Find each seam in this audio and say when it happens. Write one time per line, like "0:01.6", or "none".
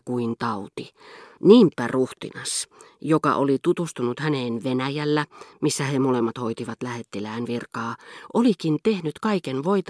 0:01.4